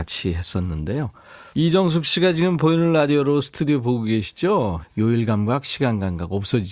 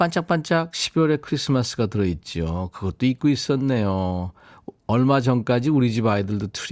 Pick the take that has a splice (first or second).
first